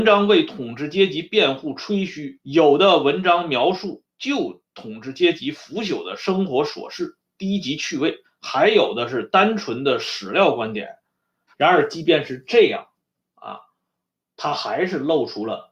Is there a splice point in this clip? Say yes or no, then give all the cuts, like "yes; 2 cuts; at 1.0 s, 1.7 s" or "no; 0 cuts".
yes; 3 cuts; at 2.4 s, 8.2 s, 11.5 s